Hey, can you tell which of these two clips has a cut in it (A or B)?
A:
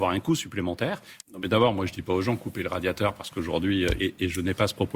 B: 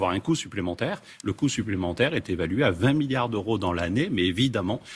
A